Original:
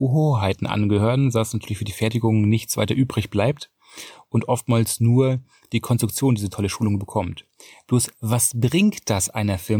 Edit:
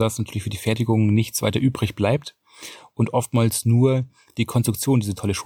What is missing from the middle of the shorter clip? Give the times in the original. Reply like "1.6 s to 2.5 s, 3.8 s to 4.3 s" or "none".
none